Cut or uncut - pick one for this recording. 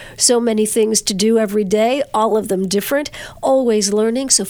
uncut